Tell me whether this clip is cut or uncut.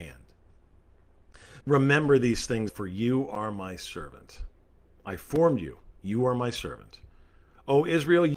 cut